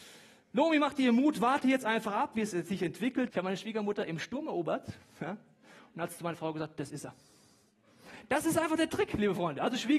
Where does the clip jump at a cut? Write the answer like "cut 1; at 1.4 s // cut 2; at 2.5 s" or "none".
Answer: cut 1; at 3.3 s